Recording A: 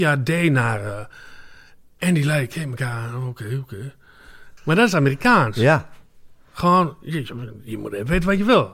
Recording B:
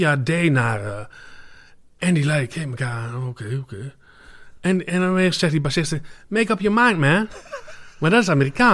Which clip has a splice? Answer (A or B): A